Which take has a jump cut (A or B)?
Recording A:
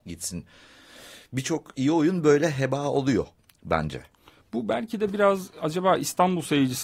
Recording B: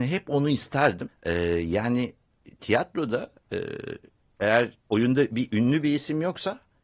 B